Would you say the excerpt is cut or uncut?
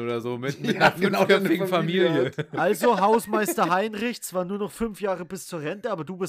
uncut